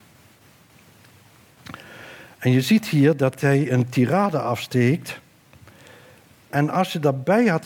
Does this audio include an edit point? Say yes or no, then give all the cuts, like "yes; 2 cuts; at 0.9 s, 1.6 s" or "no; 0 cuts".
no; 0 cuts